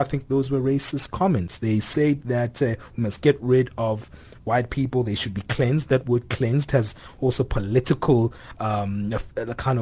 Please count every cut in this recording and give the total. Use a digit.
0